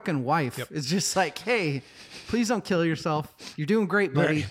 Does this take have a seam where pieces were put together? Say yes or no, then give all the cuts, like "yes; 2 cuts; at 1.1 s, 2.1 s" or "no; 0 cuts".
no; 0 cuts